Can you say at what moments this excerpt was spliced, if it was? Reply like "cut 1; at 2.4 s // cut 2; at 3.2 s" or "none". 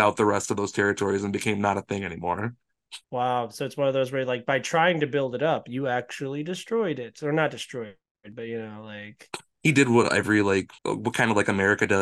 cut 1; at 3.0 s // cut 2; at 10.8 s